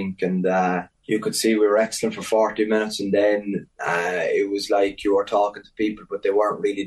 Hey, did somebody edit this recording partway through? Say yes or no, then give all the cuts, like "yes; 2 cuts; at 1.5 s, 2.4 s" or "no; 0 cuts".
yes; 1 cut; at 0.9 s